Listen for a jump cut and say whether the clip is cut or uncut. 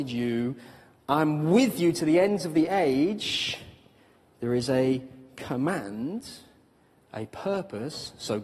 uncut